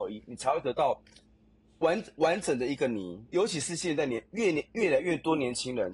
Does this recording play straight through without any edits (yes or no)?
no